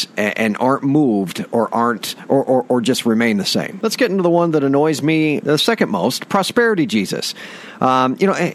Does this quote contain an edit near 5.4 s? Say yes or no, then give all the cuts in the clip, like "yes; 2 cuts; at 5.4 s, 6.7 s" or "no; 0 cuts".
yes; 1 cut; at 5.4 s